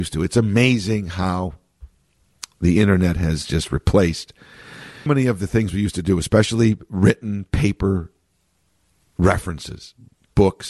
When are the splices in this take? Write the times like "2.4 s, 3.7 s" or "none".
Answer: 5.1 s